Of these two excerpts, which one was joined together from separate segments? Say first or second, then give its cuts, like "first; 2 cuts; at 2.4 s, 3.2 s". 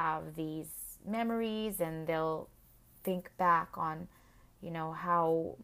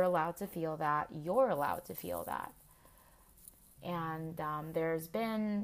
second; 1 cut; at 3.8 s